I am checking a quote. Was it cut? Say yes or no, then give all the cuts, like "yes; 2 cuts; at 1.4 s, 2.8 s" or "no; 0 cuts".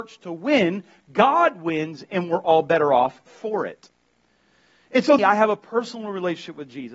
yes; 1 cut; at 5.2 s